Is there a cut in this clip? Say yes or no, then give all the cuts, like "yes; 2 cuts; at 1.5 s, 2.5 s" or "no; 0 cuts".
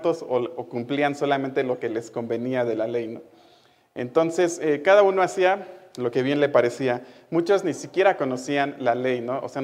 no; 0 cuts